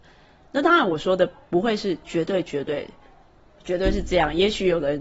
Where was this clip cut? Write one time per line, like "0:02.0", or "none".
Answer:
none